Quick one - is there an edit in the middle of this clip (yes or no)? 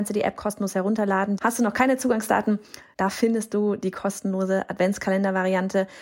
yes